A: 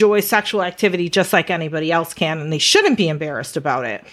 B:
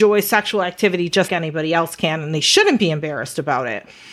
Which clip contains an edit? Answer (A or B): B